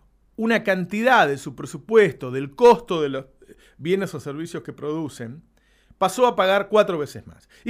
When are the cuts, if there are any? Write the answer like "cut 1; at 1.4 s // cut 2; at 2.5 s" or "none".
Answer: none